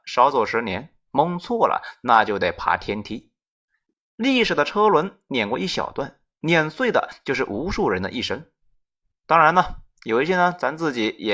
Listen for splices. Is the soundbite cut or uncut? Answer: uncut